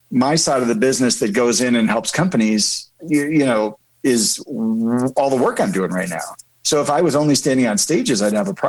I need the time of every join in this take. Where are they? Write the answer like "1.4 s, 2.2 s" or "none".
none